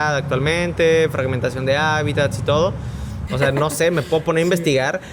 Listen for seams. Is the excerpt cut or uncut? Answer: cut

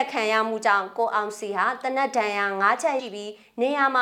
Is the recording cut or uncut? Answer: cut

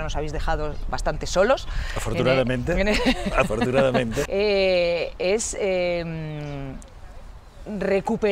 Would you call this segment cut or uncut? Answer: cut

